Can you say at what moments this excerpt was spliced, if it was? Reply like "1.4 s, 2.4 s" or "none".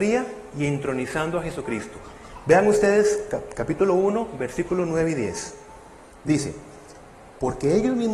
none